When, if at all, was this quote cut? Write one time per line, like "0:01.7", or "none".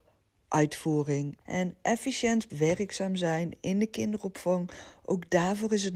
0:01.4
0:02.5